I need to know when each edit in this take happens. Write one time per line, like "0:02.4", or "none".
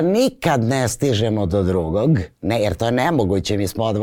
0:02.3

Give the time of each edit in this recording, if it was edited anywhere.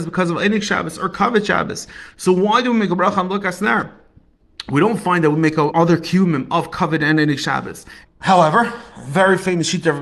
0:05.7
0:08.0

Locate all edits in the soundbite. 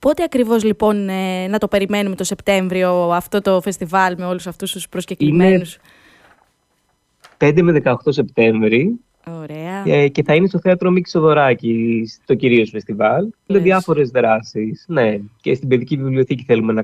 0:13.5

